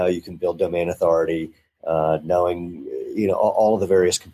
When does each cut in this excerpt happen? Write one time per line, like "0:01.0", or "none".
none